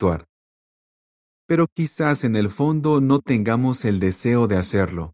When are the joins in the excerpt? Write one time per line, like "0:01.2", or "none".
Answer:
0:01.3